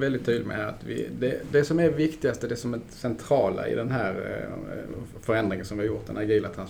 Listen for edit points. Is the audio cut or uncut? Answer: uncut